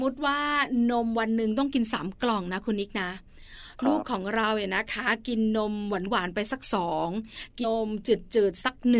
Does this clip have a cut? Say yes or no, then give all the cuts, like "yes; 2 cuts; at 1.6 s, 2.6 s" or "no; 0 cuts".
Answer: yes; 1 cut; at 7.6 s